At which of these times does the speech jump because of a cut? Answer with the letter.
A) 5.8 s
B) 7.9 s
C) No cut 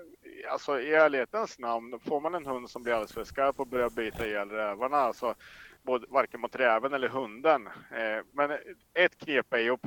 A